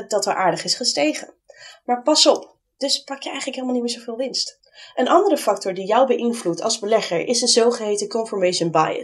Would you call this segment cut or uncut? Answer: cut